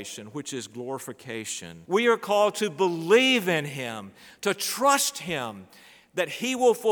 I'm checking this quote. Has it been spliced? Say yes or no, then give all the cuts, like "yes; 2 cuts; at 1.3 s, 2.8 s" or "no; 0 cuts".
yes; 1 cut; at 1.8 s